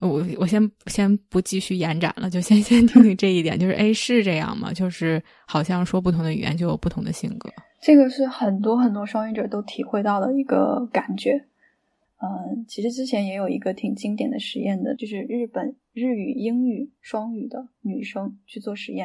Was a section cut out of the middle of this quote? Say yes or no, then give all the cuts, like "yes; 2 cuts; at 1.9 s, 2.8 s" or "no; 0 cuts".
yes; 2 cuts; at 12.0 s, 15.0 s